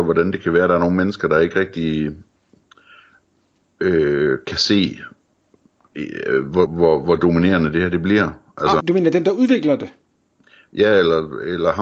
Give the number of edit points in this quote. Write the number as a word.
two